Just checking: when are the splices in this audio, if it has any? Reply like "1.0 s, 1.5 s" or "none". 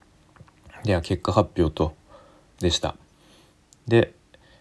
2.6 s